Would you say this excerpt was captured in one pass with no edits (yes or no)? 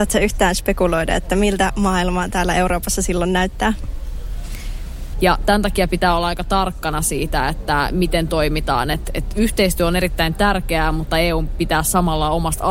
no